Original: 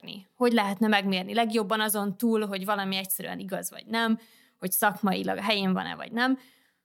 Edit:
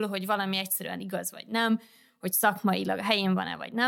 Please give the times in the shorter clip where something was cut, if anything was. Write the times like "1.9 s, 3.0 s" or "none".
none